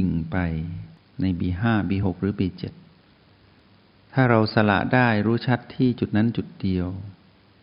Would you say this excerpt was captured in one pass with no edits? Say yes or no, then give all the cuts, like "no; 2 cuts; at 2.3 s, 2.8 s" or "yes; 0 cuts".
yes; 0 cuts